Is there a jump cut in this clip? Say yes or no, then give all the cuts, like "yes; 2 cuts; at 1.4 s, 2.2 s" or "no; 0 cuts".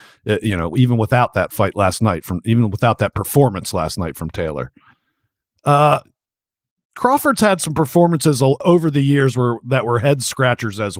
no; 0 cuts